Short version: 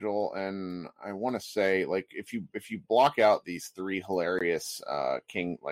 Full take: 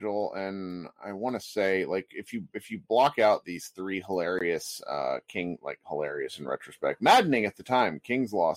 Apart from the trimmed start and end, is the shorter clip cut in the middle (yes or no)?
no